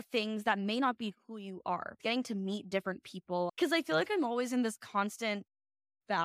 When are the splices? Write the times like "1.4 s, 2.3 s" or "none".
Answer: 2.0 s, 3.5 s